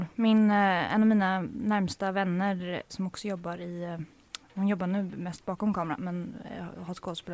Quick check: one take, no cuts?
no; 1 cut; at 2.9 s

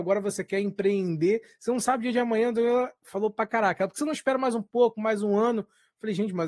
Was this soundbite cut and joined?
no; 0 cuts

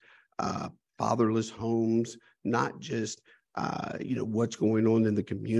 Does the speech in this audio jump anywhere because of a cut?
no; 0 cuts

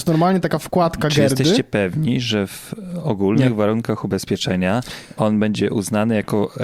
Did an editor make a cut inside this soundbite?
no; 0 cuts

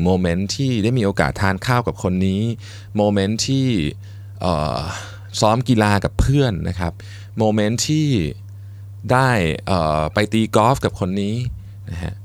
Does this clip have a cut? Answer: no; 0 cuts

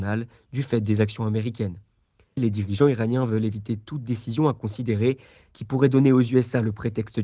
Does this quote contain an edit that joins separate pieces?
no; 0 cuts

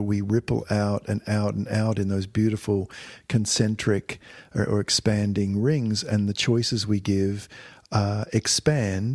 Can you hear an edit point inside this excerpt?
no; 0 cuts

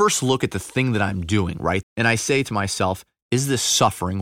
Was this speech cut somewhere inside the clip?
yes; 2 cuts; at 1.8 s, 3.2 s

